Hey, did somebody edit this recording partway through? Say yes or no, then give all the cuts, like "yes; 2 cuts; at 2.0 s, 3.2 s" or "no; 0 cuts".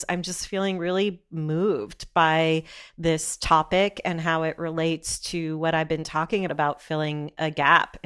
yes; 1 cut; at 6.5 s